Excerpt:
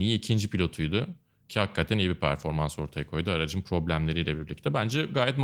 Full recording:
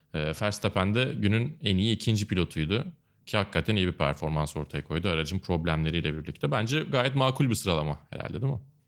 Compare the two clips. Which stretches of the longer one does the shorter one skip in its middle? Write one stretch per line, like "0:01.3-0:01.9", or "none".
none